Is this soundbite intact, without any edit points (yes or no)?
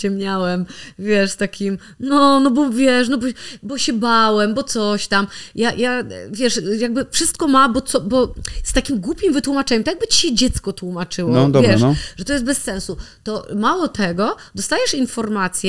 yes